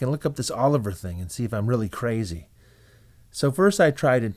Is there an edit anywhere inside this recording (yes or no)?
no